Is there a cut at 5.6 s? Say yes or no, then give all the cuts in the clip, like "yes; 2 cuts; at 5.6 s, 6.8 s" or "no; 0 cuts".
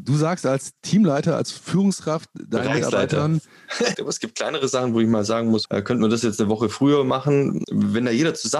yes; 3 cuts; at 3.9 s, 5.6 s, 7.6 s